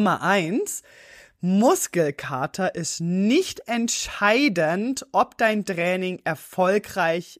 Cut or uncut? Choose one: uncut